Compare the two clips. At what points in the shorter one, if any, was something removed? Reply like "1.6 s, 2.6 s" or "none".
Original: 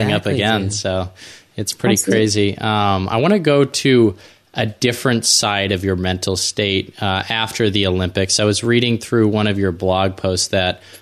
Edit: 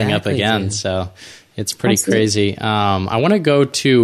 none